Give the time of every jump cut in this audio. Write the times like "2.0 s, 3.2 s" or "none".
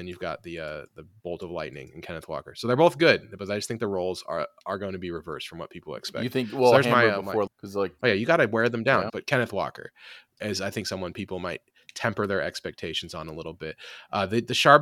7.5 s, 9.1 s